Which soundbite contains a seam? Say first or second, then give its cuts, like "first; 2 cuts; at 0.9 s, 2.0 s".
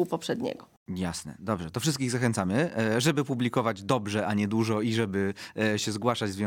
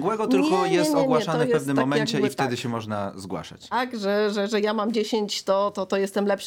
second; 1 cut; at 3.7 s